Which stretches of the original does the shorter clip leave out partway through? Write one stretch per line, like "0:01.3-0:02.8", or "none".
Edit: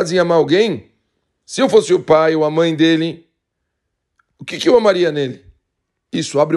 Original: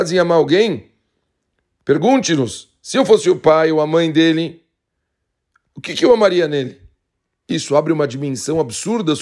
0:01.4-0:02.8